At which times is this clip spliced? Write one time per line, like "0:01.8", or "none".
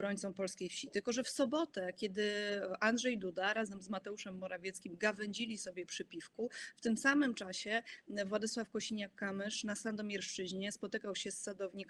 none